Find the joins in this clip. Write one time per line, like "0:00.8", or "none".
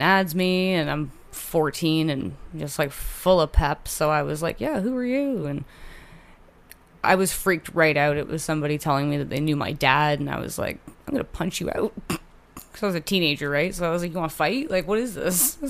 none